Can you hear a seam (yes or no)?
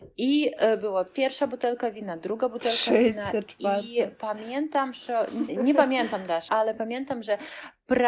yes